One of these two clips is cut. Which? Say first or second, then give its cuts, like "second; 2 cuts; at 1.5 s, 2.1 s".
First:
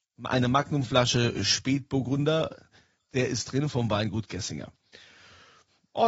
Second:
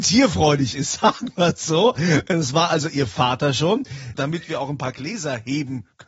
second; 1 cut; at 4.1 s